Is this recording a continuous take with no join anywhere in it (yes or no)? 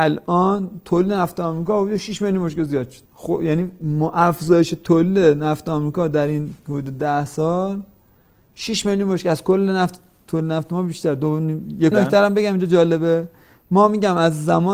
no